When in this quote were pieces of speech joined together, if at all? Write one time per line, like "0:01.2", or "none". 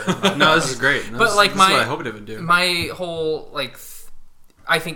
none